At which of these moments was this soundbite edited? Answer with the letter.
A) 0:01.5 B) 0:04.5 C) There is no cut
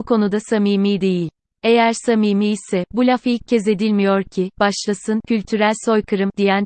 C